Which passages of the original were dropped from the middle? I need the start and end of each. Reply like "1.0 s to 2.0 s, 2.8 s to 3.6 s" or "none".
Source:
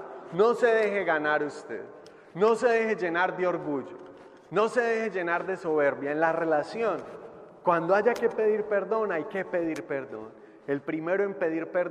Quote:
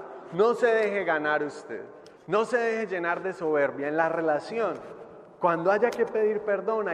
2.2 s to 4.4 s